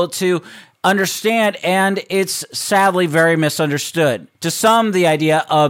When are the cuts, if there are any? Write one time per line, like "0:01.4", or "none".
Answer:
0:04.3